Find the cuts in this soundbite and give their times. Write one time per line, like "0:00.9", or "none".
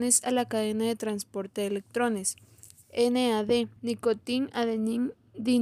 0:03.8